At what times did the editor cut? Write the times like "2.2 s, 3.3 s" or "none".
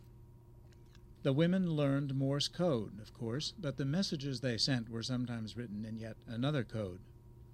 1.2 s